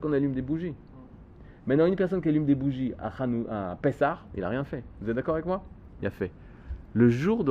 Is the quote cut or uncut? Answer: uncut